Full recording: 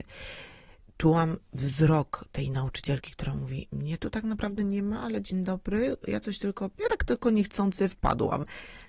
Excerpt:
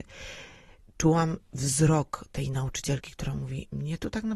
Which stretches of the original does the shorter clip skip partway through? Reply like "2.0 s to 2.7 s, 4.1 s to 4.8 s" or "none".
none